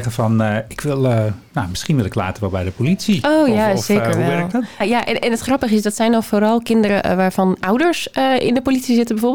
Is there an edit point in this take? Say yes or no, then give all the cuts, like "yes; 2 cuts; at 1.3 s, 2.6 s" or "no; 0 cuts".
yes; 1 cut; at 4.8 s